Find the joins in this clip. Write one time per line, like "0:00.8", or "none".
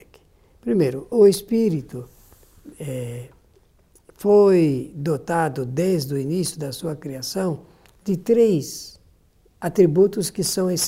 0:01.1